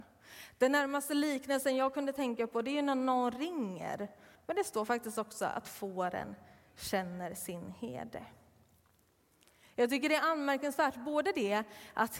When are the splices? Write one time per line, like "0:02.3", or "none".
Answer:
0:04.3